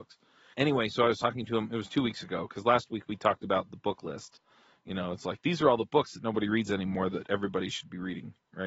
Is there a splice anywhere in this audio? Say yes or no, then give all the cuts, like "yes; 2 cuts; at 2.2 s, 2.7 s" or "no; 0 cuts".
no; 0 cuts